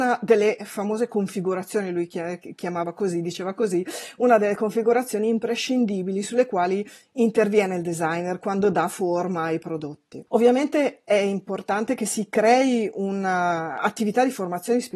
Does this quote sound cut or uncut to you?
cut